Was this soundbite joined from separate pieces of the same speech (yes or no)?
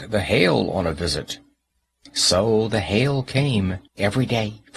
yes